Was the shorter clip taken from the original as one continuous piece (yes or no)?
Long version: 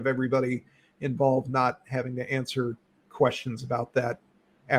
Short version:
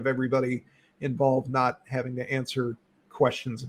yes